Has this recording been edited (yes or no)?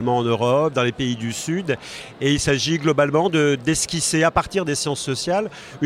no